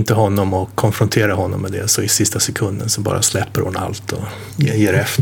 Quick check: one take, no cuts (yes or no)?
yes